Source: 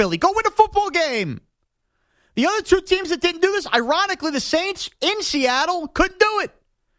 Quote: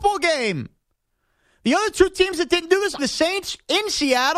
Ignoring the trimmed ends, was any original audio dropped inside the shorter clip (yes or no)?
yes